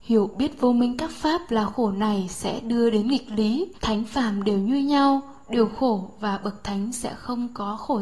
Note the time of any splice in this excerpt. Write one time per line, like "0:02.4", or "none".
0:03.8